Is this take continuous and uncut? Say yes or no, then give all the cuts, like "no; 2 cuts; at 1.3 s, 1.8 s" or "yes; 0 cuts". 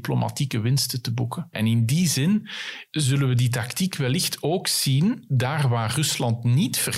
no; 2 cuts; at 1.5 s, 2.9 s